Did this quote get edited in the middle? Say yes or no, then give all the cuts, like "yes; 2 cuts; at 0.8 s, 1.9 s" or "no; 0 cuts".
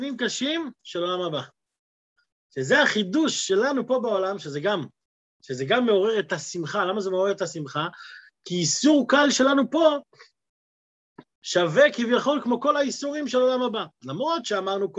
no; 0 cuts